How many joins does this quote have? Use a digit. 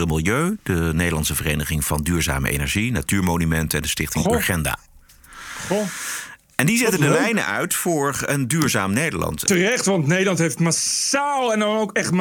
2